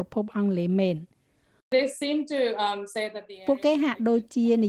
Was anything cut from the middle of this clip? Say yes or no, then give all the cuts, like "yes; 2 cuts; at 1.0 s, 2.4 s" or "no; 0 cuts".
no; 0 cuts